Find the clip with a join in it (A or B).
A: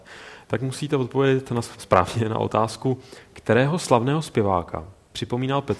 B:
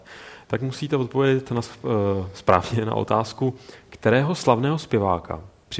A